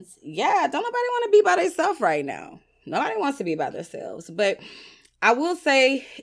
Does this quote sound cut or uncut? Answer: uncut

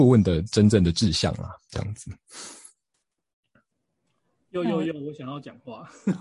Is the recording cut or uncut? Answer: uncut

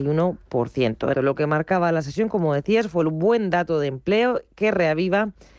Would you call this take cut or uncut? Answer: cut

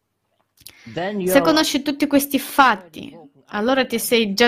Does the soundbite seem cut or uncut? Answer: uncut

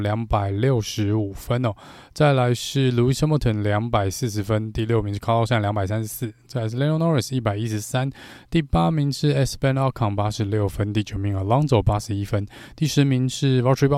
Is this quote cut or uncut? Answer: uncut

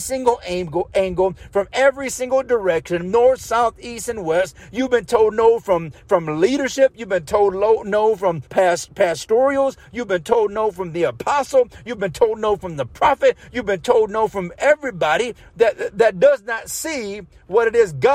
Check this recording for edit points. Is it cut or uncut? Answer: cut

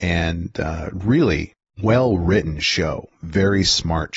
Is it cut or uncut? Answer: uncut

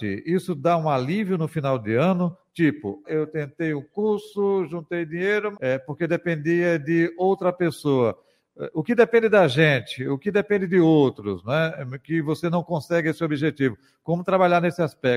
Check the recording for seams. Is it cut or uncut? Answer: cut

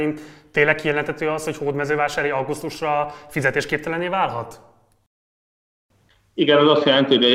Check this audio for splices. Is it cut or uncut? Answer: uncut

